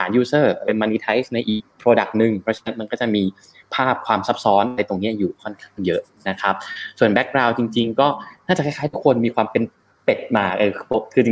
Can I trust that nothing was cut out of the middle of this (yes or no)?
yes